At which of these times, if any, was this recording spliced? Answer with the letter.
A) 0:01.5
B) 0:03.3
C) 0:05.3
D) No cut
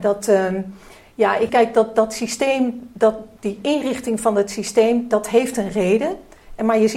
A